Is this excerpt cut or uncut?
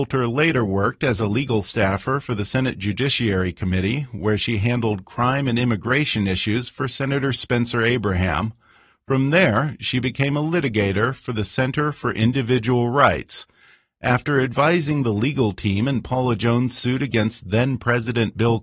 uncut